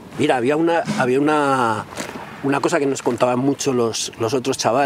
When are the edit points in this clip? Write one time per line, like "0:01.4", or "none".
none